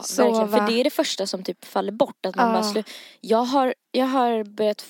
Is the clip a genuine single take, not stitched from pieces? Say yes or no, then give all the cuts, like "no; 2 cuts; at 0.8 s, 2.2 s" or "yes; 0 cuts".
no; 1 cut; at 3.8 s